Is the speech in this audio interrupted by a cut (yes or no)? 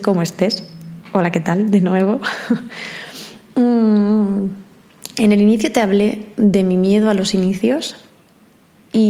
no